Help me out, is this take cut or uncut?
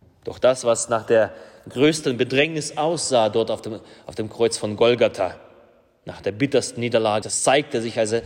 cut